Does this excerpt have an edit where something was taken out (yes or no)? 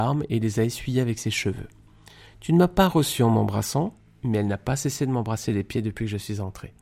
no